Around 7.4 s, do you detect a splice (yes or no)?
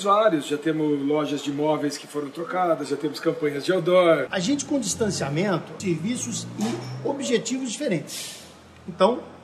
no